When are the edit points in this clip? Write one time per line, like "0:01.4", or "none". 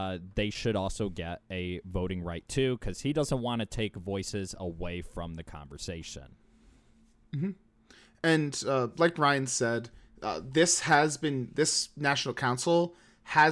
none